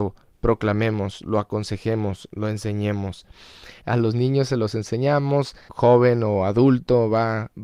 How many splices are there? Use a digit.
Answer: 2